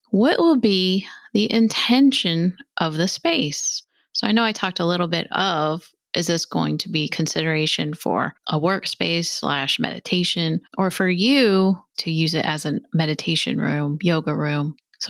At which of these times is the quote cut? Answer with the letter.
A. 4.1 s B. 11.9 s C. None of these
B